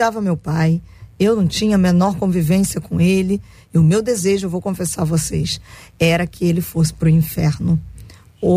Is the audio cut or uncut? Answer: uncut